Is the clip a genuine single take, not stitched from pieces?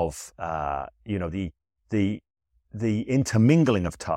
yes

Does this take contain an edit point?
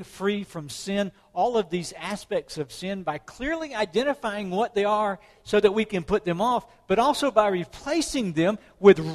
no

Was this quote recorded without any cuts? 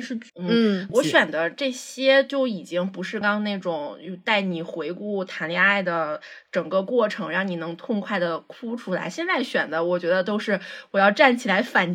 no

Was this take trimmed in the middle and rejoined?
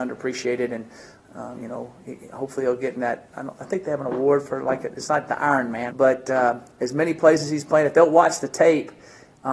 yes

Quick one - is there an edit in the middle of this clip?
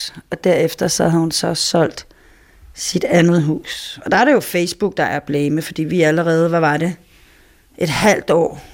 no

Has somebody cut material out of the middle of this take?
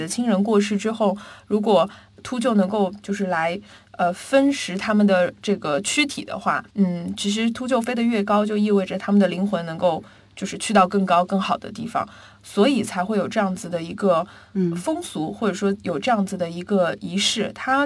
yes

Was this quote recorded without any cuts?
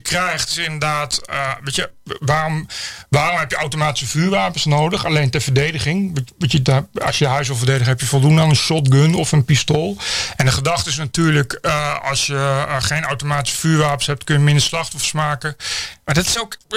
yes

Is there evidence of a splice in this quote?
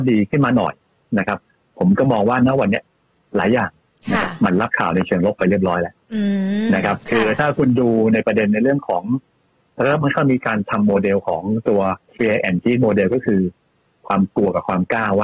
yes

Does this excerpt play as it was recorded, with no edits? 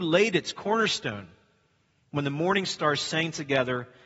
yes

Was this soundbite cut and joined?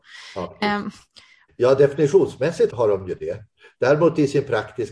yes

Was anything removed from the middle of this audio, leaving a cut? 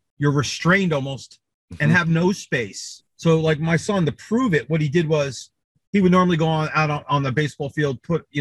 yes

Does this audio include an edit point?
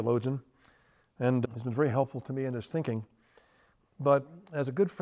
no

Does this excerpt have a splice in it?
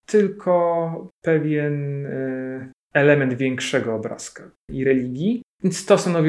yes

